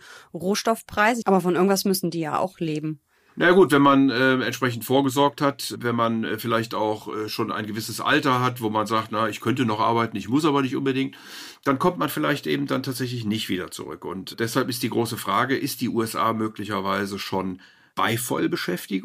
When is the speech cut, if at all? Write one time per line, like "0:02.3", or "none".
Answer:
0:01.2